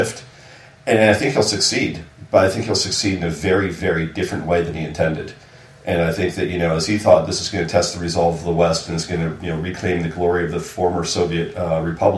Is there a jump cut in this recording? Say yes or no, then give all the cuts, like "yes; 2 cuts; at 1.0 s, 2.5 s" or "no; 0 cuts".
no; 0 cuts